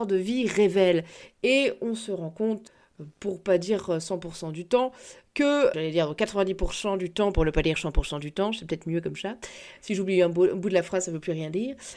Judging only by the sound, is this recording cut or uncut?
cut